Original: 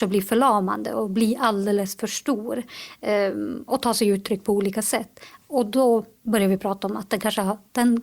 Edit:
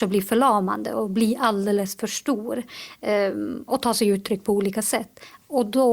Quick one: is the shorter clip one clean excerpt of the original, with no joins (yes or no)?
yes